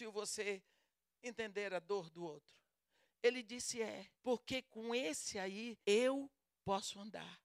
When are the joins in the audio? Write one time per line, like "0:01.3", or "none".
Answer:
0:03.1
0:04.1
0:05.8